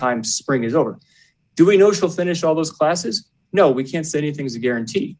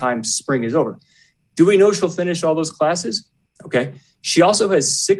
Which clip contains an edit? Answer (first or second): second